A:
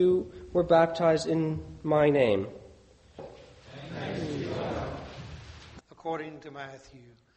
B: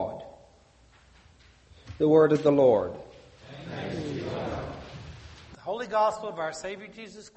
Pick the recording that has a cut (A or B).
A